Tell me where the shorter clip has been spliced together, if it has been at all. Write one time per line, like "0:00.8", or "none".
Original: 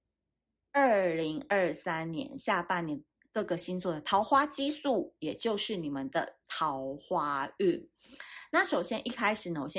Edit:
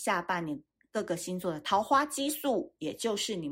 none